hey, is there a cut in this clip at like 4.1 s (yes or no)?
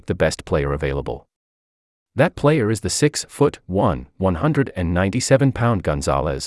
no